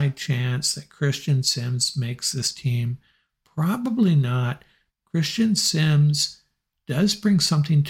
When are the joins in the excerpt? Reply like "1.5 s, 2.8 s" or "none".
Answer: 4.9 s

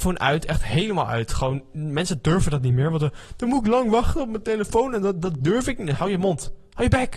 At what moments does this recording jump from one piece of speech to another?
none

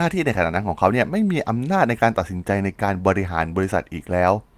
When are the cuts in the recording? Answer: none

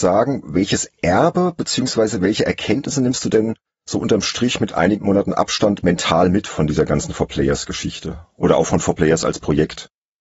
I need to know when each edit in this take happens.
none

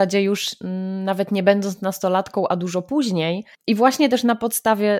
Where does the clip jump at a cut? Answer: 3.5 s

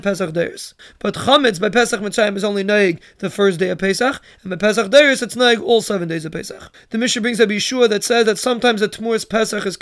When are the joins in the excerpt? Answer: none

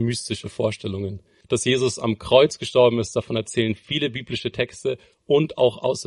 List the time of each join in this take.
1.4 s

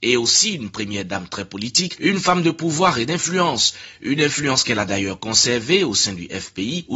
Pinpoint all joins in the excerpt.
none

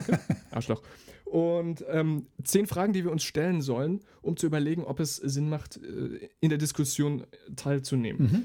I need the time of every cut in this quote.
none

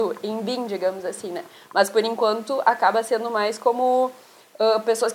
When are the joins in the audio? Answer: none

